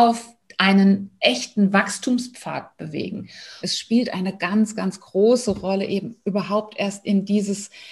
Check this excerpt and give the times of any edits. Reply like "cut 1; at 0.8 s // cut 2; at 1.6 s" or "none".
cut 1; at 3.6 s